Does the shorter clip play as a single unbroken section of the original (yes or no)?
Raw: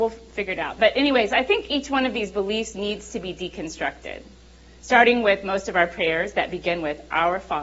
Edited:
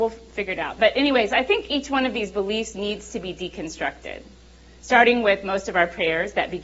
yes